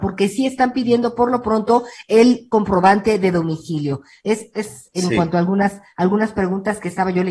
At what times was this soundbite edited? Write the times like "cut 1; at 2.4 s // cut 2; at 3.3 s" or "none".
none